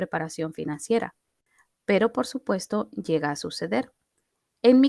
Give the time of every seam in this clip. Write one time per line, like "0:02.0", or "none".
none